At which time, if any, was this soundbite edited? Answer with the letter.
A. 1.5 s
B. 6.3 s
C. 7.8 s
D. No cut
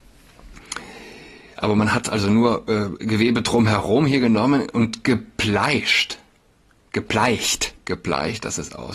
C